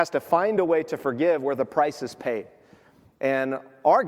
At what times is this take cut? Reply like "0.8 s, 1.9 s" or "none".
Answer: none